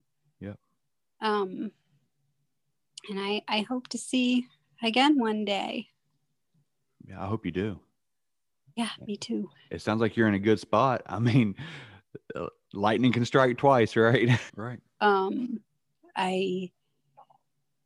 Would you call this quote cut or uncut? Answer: cut